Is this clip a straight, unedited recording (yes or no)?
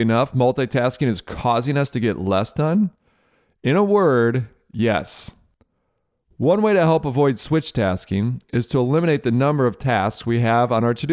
yes